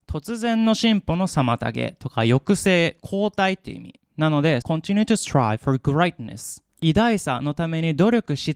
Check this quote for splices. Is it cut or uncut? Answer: cut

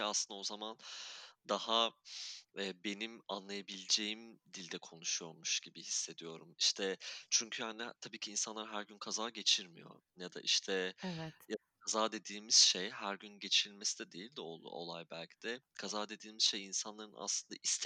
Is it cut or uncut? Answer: uncut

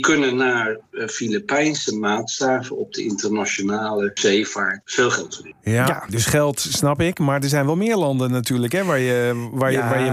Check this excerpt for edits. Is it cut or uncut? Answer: cut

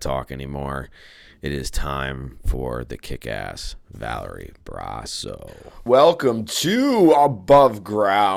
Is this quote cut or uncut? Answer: cut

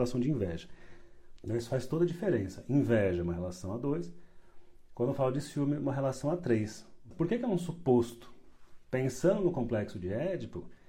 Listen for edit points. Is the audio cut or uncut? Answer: cut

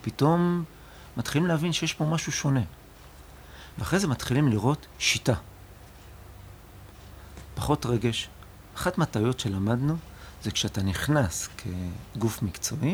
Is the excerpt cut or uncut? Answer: uncut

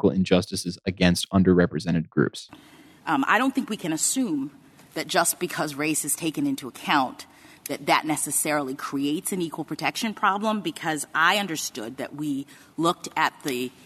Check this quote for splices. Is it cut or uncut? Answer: uncut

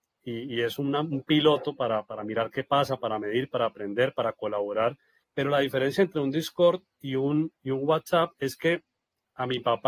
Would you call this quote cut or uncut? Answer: cut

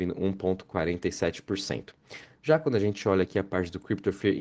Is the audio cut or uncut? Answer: uncut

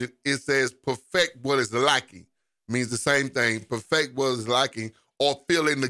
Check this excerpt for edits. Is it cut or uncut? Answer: uncut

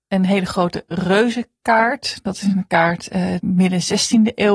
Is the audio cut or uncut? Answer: cut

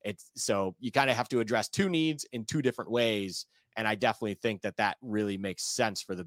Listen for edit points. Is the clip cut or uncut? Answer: uncut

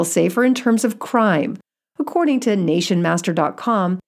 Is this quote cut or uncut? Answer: uncut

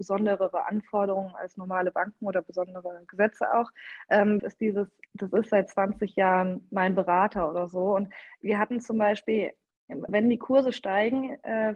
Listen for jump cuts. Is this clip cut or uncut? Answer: cut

